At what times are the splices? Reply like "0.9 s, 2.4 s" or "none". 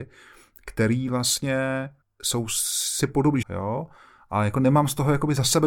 2.0 s, 3.4 s